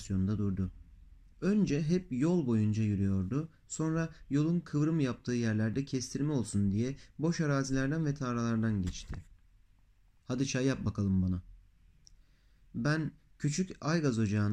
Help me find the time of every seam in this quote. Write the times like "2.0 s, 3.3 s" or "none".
1.3 s, 10.2 s

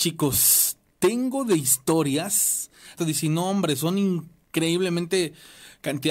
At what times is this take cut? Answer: 3.0 s

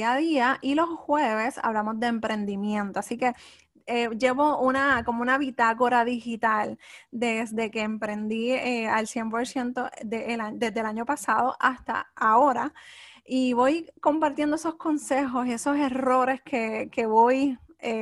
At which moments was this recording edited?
14.0 s

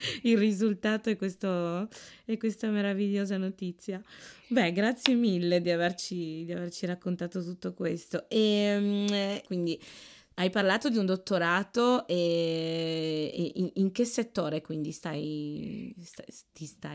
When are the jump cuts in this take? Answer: 9.4 s

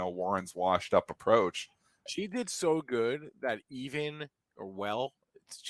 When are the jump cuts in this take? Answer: 2.1 s

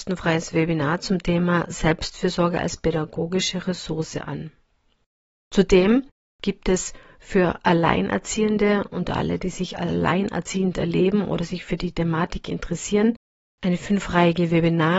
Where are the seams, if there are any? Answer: none

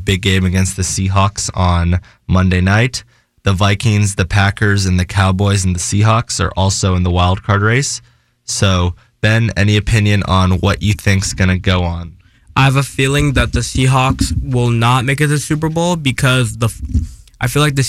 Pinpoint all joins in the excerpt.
none

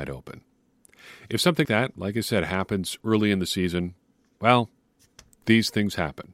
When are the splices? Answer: 1.6 s

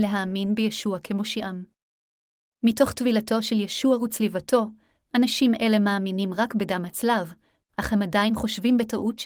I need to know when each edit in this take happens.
none

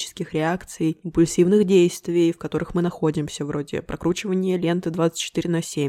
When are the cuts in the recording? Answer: none

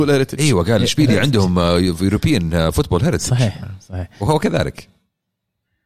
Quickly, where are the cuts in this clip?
none

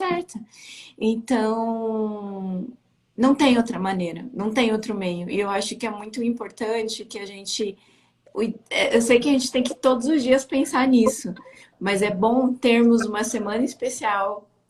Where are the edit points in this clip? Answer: none

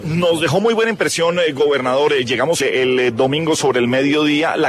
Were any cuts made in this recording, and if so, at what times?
2.6 s

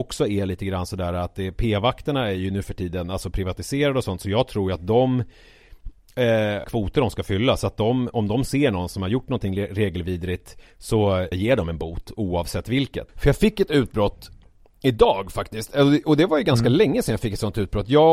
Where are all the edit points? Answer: 6.6 s, 11.3 s, 13.1 s

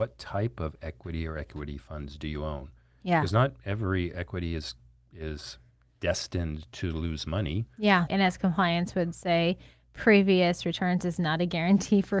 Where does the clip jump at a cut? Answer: 8.1 s

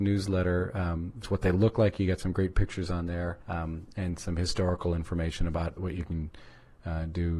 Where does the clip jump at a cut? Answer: 1.2 s, 3.4 s, 5.8 s

